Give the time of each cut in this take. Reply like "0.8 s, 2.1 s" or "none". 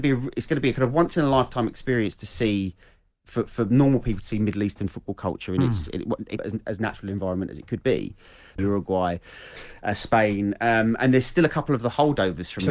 6.4 s, 8.6 s